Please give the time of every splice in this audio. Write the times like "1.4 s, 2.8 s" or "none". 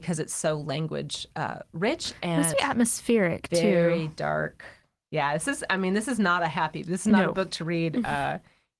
2.5 s